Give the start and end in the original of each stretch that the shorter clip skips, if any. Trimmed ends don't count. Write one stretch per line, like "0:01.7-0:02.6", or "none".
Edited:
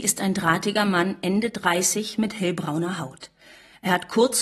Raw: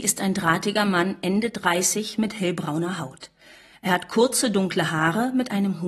none